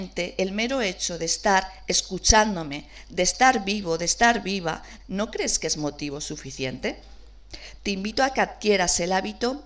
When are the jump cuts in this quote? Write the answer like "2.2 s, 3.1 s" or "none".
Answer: 5.0 s, 7.8 s